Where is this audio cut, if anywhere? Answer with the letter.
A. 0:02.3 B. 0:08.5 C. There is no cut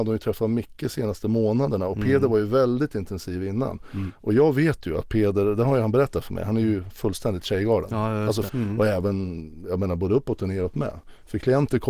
B